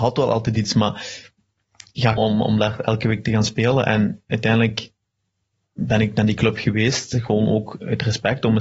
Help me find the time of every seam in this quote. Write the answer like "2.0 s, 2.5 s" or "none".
2.2 s

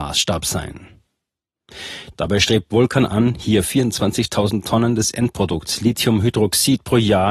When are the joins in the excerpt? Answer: 2.1 s

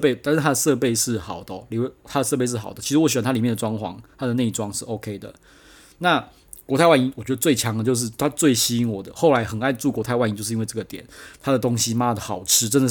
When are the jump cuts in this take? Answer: none

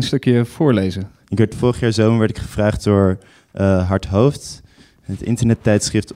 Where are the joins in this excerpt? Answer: 1.2 s

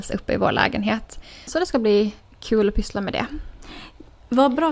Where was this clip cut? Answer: 1.5 s

